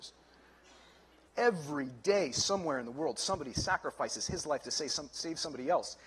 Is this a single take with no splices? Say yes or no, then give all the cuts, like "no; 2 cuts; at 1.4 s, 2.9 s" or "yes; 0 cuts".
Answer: no; 1 cut; at 1.2 s